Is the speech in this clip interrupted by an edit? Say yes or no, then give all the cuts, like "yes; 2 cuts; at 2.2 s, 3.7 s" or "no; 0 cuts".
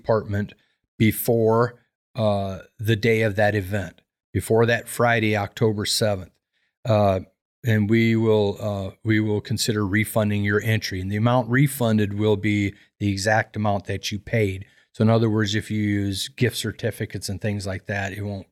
no; 0 cuts